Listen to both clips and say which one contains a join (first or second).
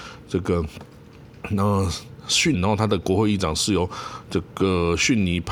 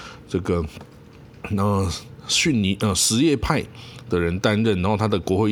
first